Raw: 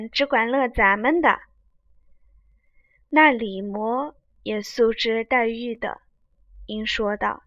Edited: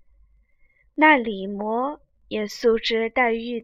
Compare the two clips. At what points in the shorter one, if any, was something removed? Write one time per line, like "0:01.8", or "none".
none